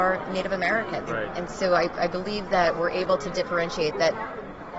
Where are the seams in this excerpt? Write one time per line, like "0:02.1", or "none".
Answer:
0:01.1